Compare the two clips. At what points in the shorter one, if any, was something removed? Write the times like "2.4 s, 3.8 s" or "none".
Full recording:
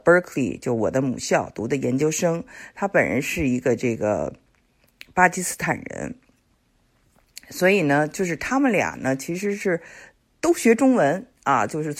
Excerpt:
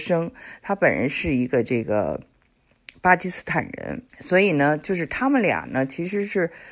4.1 s